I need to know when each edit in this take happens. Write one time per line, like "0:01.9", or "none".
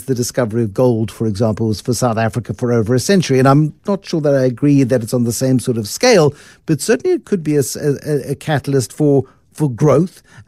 none

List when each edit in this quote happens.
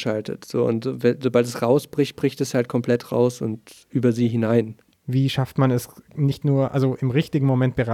0:04.9

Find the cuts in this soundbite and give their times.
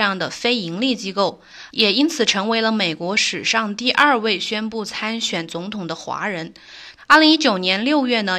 0:01.7
0:07.0

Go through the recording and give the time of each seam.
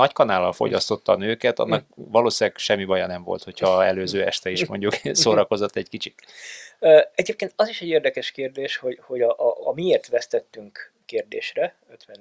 none

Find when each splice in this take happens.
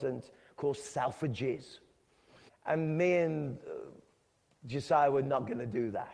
0:02.5

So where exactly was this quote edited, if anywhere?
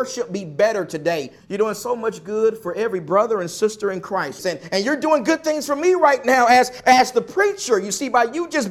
0:01.4
0:04.4

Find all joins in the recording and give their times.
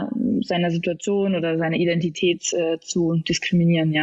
none

